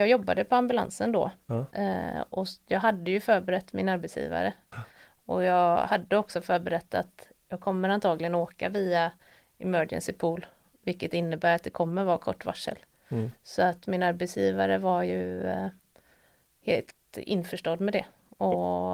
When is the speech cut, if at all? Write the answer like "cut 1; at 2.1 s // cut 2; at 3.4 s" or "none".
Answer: none

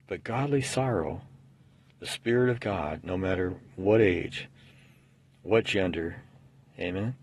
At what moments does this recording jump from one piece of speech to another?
cut 1; at 3.0 s

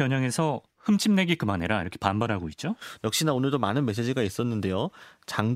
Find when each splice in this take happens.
cut 1; at 3.0 s

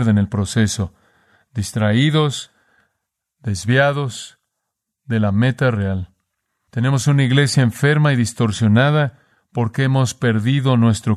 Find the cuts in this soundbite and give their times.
none

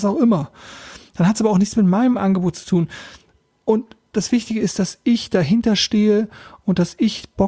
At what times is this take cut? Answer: none

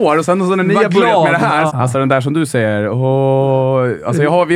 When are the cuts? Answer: cut 1; at 1.7 s

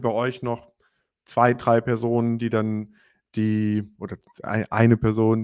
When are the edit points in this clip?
none

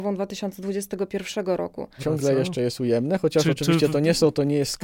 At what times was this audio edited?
cut 1; at 2.0 s

